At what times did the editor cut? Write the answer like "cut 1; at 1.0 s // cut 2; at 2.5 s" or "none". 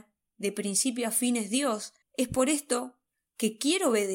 cut 1; at 2.0 s